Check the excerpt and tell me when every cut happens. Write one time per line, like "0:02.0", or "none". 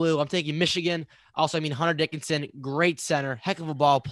none